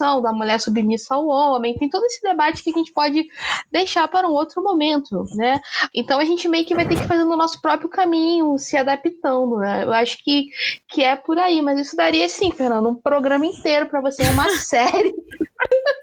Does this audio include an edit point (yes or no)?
yes